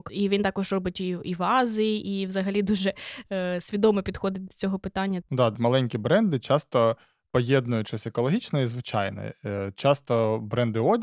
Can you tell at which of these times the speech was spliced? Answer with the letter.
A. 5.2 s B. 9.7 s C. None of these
A